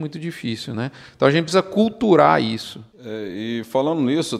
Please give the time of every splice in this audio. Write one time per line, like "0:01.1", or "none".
0:02.9